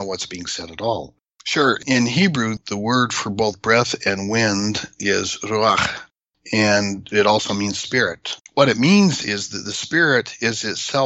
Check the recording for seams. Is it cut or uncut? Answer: cut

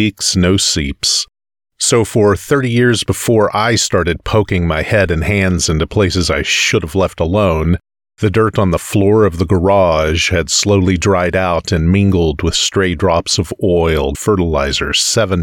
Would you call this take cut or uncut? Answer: cut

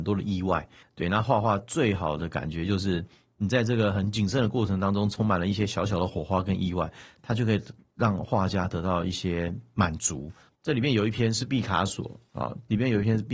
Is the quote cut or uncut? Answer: cut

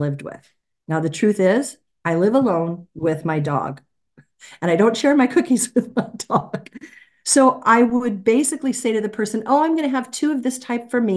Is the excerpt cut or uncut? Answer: uncut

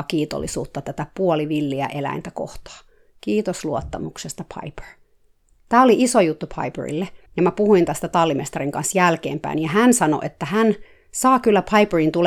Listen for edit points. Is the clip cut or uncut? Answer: cut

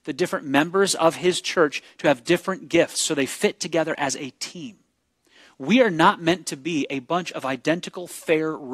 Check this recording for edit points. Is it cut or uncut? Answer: uncut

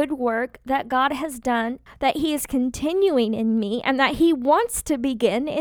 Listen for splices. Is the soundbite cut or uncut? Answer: cut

